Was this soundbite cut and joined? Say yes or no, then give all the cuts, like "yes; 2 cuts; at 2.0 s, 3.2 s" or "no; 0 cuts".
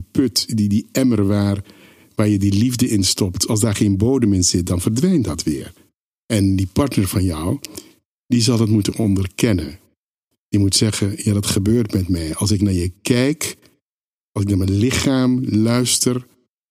no; 0 cuts